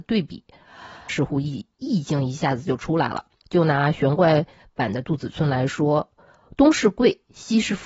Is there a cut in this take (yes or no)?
yes